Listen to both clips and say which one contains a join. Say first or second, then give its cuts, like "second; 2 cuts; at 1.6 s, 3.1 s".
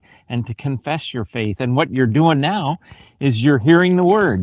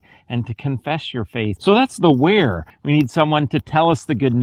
second; 2 cuts; at 1.6 s, 2.7 s